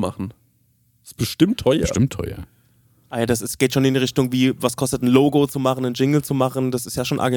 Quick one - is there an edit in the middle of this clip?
no; 0 cuts

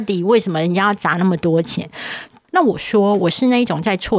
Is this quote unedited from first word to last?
no; 1 cut; at 2.4 s

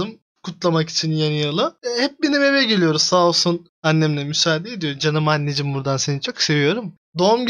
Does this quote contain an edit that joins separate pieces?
no; 0 cuts

